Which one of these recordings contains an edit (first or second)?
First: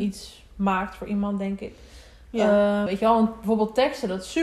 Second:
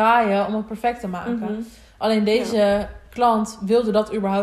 first